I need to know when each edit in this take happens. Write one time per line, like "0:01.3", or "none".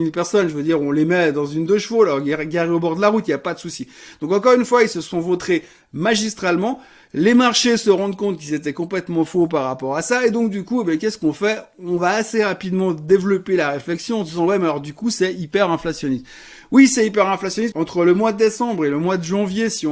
0:17.7